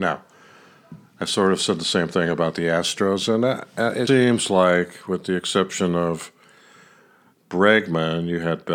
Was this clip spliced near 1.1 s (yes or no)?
no